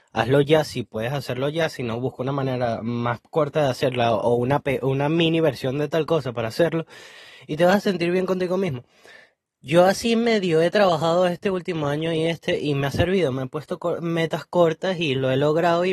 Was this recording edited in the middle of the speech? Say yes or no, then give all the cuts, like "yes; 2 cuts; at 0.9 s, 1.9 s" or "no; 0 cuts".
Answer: no; 0 cuts